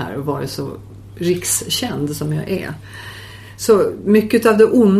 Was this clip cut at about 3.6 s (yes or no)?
no